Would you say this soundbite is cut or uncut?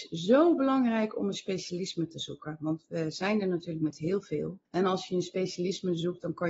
cut